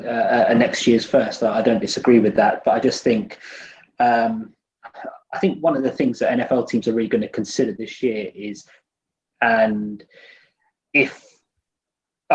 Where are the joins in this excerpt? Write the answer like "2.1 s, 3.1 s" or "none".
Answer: 9.3 s